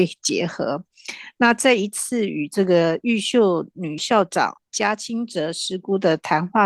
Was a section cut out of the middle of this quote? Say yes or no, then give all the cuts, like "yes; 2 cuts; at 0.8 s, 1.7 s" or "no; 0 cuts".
yes; 1 cut; at 4.0 s